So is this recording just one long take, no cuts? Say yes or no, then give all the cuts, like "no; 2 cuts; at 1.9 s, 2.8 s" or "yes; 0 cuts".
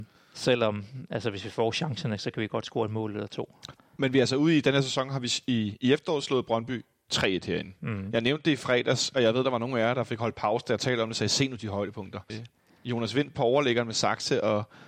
no; 1 cut; at 12.3 s